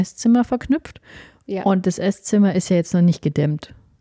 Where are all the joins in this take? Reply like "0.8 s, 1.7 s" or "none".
none